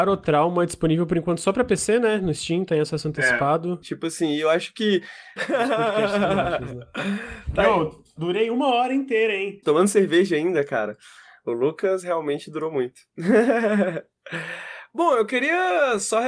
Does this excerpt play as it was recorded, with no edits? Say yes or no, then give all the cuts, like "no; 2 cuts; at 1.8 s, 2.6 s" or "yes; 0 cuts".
no; 3 cuts; at 3.8 s, 5.4 s, 9.6 s